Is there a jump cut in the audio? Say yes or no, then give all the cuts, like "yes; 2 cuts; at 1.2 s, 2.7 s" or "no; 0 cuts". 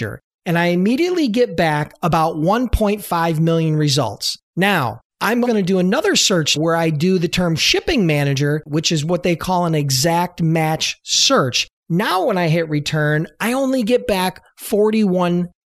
yes; 3 cuts; at 5.4 s, 6.6 s, 8.7 s